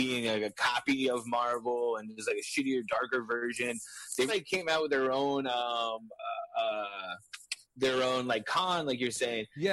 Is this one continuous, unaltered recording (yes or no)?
no